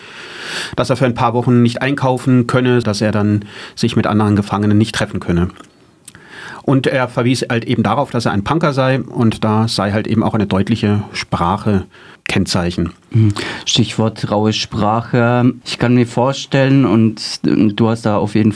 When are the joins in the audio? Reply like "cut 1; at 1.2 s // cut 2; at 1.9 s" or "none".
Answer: cut 1; at 2.8 s

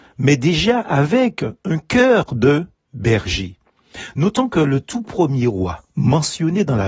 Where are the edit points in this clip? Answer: none

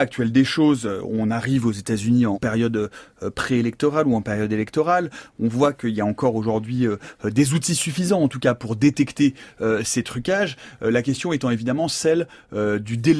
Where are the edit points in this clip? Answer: cut 1; at 2.3 s

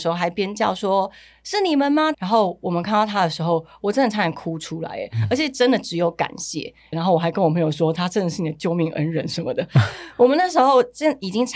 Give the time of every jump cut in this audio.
cut 1; at 2.1 s // cut 2; at 6.9 s

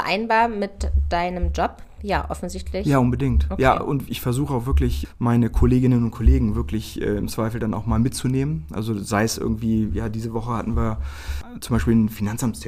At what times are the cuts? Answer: none

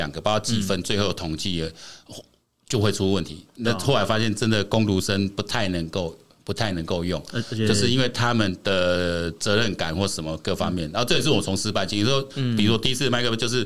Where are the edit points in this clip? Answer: none

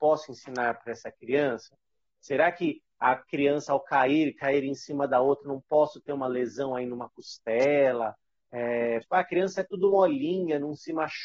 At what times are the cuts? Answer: cut 1; at 9.0 s

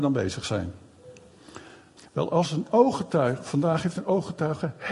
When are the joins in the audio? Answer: cut 1; at 2.0 s

